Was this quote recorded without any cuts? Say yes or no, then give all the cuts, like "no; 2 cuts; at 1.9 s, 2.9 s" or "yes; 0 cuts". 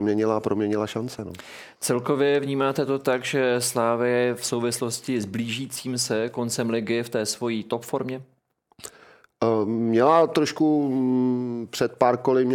yes; 0 cuts